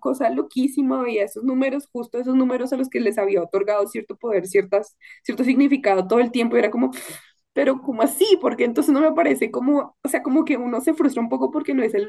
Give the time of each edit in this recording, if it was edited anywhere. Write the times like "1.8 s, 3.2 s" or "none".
none